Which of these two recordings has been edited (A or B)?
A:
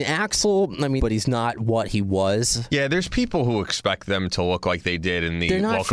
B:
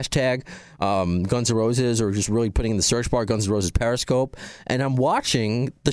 A